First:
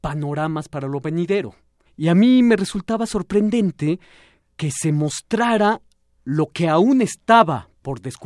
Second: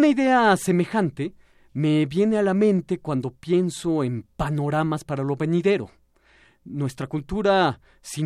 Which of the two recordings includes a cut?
first; 1 cut; at 1.9 s

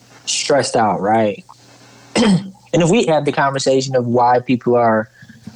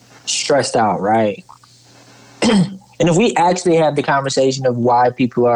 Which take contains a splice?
first; 2 cuts; at 1.5 s, 3.1 s

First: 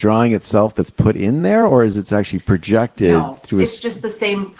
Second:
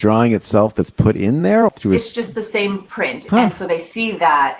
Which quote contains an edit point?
second; 2 cuts; at 1.7 s, 3.3 s

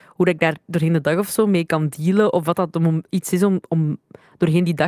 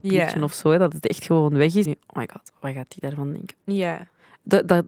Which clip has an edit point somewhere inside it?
second; 2 cuts; at 1.8 s, 3.6 s

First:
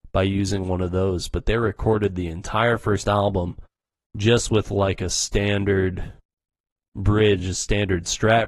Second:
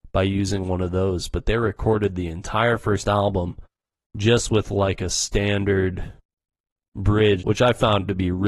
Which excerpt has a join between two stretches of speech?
second; 1 cut; at 7.4 s

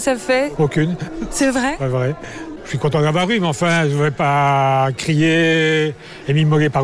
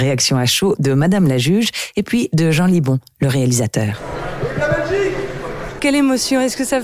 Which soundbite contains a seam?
second; 1 cut; at 5.8 s

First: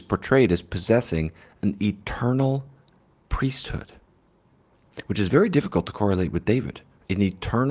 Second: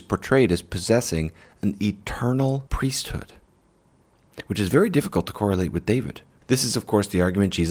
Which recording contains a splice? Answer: second; 2 cuts; at 2.7 s, 6.4 s

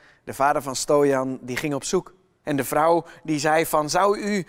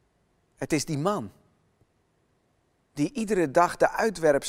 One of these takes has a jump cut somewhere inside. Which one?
first; 1 cut; at 2.4 s

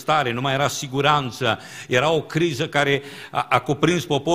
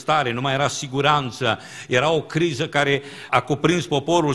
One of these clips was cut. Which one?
second; 1 cut; at 3.3 s

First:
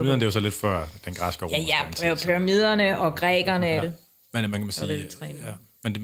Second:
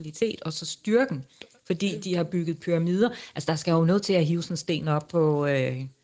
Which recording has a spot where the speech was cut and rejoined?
first; 1 cut; at 3.8 s

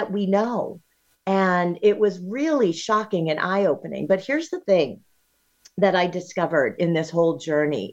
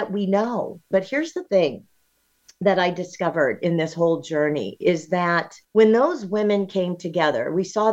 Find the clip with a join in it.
second; 2 cuts; at 0.9 s, 5.6 s

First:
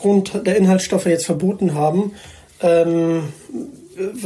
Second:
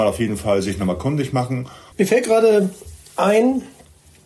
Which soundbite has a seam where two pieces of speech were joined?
second; 1 cut; at 1.9 s

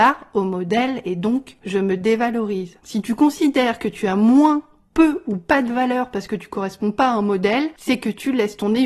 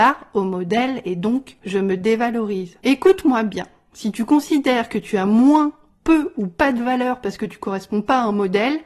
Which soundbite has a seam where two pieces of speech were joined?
first; 1 cut; at 2.8 s

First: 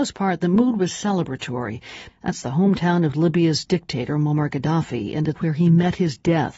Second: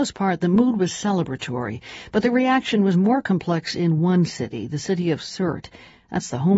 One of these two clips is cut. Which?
first; 2 cuts; at 2.1 s, 5.4 s

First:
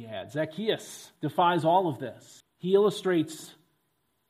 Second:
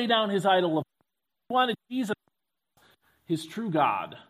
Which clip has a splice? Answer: first; 2 cuts; at 1.2 s, 2.4 s

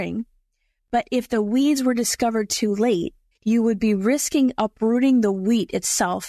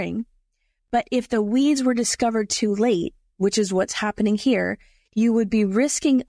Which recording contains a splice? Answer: first; 1 cut; at 3.3 s

